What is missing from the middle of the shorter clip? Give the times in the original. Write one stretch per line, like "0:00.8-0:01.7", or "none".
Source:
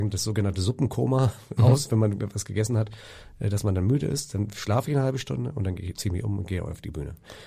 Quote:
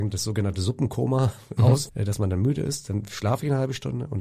0:01.9-0:03.3